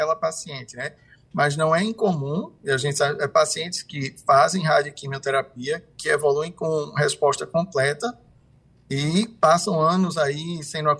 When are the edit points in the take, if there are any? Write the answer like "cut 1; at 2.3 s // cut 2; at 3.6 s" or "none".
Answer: none

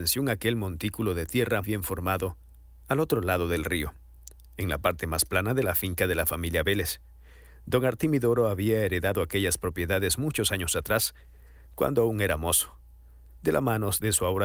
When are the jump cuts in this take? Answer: cut 1; at 1.6 s

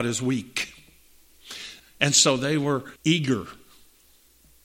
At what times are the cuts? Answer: cut 1; at 1.8 s // cut 2; at 3.0 s

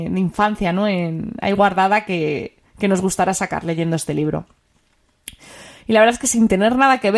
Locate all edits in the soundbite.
none

